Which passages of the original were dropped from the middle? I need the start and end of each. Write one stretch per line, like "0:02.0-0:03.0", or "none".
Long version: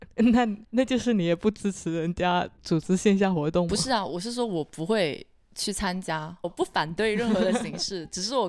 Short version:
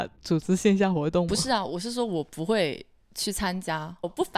none